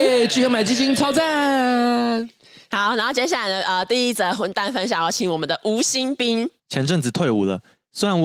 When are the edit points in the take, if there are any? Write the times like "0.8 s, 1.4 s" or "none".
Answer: none